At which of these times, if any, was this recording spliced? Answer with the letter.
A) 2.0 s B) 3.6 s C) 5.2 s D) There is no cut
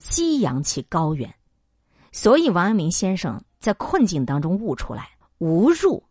C